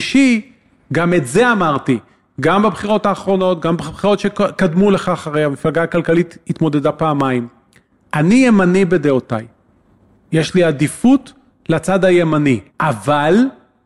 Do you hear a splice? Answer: yes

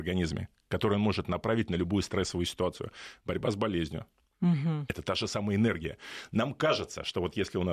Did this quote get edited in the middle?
no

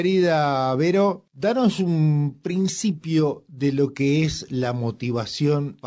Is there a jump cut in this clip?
no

